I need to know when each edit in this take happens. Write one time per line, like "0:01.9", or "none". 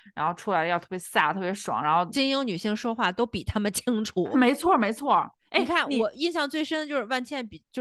0:04.3